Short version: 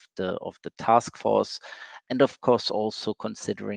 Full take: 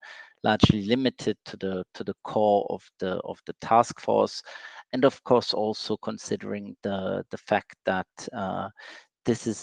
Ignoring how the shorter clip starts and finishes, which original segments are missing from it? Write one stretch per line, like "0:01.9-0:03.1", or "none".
none